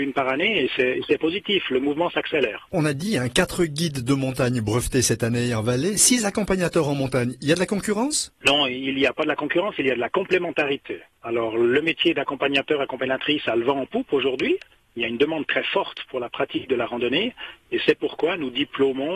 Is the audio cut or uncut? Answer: uncut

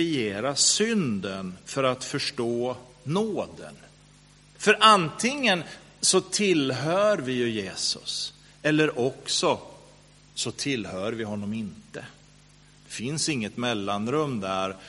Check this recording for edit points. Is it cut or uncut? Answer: cut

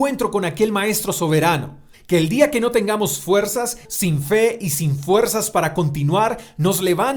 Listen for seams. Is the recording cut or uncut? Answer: cut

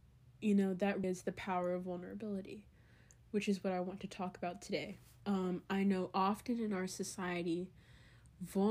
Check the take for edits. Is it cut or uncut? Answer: cut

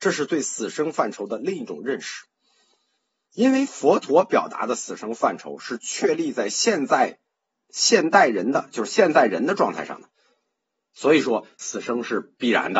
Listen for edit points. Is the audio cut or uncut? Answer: uncut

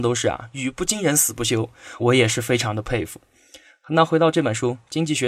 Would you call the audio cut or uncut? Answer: cut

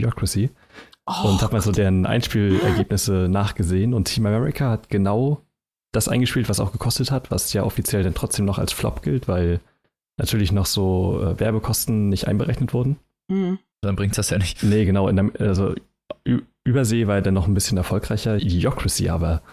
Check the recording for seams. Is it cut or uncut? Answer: cut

